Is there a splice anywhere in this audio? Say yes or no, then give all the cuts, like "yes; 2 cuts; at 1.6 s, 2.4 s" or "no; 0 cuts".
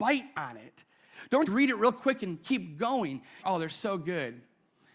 yes; 2 cuts; at 1.5 s, 3.4 s